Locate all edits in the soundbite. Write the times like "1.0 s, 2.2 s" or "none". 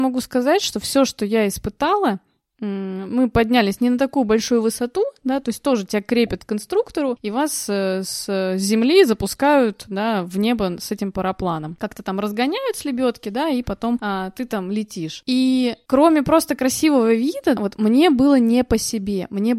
17.6 s